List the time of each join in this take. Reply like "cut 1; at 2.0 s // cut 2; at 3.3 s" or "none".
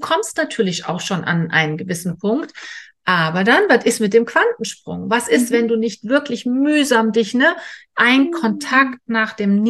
none